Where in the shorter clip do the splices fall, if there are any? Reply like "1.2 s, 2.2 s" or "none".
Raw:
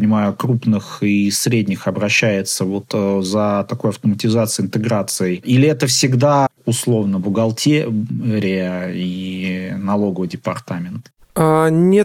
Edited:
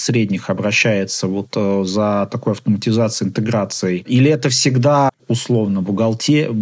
none